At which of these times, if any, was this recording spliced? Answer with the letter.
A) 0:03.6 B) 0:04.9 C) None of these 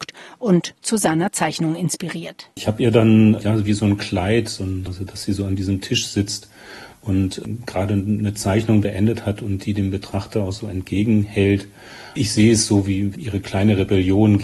B